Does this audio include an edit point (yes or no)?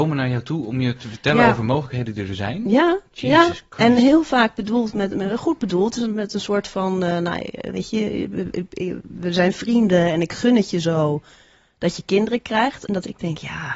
no